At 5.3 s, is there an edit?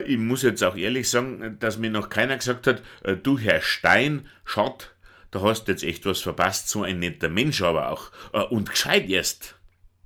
no; 0 cuts

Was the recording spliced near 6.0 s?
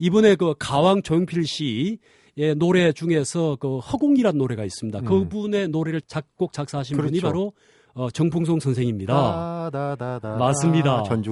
yes; 1 cut; at 6.0 s

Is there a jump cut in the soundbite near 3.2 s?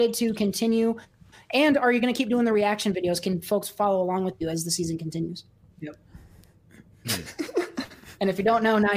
no; 1 cut; at 5.6 s

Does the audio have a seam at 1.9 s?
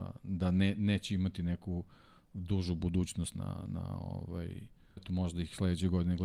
no; 2 cuts; at 3.3 s, 5.0 s

